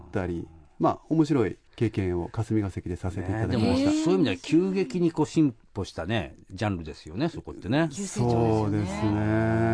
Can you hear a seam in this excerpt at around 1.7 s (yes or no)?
yes